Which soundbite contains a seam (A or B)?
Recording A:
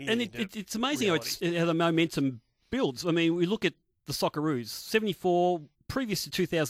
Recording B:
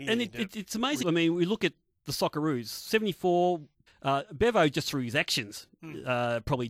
B